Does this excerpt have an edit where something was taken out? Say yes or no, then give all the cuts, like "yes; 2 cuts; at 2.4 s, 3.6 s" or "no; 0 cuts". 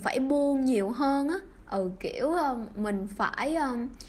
no; 0 cuts